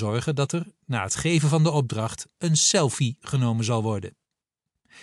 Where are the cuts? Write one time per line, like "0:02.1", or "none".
none